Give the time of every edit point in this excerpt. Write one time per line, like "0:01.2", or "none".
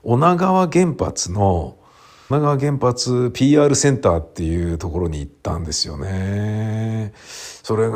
0:02.3